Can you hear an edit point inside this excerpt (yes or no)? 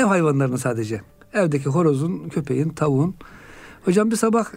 no